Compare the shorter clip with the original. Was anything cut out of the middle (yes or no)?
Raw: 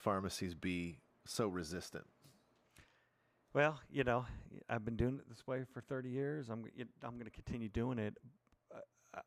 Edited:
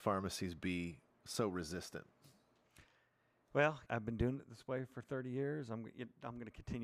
yes